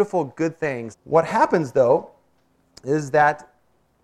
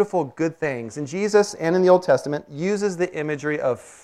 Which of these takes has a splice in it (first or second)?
first